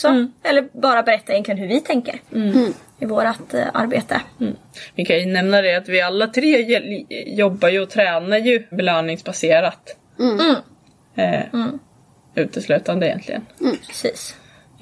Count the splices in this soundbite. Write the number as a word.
two